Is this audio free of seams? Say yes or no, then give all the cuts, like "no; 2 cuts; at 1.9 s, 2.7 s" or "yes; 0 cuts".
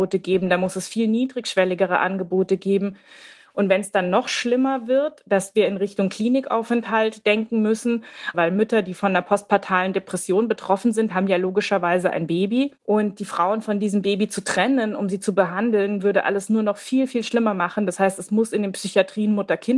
no; 1 cut; at 8.3 s